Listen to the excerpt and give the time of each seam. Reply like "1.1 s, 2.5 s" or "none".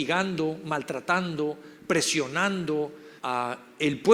3.2 s